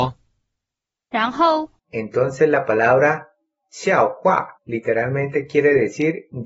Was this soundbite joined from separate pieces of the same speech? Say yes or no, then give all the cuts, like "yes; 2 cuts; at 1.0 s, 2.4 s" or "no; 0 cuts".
yes; 2 cuts; at 1.8 s, 4.6 s